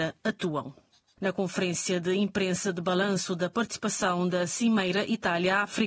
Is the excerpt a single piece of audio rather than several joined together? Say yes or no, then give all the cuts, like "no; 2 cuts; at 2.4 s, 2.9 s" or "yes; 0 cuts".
no; 1 cut; at 1.2 s